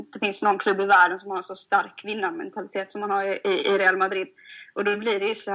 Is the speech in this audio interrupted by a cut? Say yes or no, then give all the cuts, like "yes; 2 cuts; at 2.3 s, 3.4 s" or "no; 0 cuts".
no; 0 cuts